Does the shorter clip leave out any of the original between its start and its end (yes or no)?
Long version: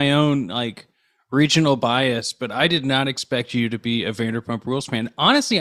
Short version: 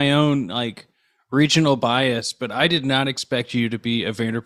no